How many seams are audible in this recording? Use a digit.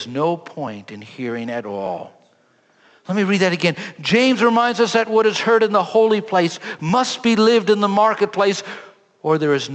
0